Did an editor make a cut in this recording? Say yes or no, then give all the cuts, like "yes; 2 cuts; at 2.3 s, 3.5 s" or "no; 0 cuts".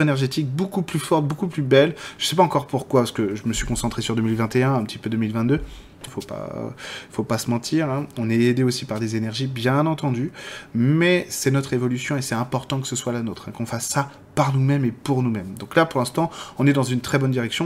yes; 1 cut; at 6.1 s